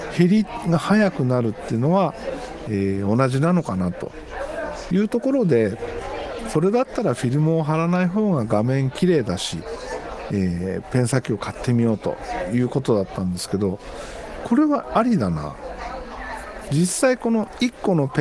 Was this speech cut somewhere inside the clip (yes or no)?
yes